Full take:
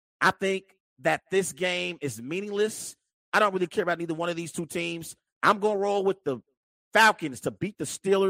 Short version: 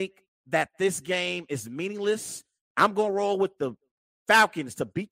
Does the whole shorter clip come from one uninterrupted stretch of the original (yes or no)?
no